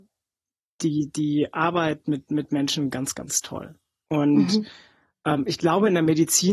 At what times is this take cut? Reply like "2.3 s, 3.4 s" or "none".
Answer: none